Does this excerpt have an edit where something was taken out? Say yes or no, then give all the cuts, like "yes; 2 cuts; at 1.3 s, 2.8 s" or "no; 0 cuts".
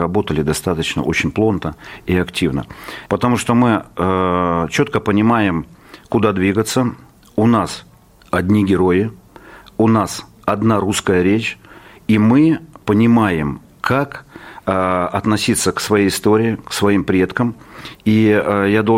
yes; 1 cut; at 3.1 s